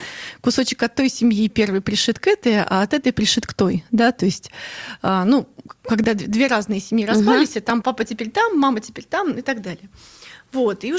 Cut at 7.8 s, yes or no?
yes